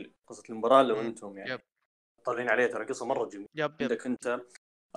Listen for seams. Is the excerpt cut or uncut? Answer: uncut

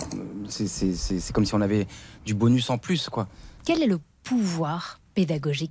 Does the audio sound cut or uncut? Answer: cut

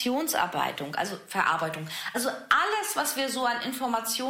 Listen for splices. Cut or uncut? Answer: uncut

